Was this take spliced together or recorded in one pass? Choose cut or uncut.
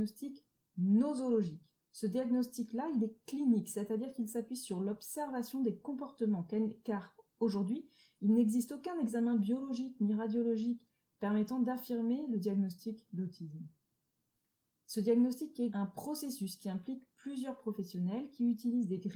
cut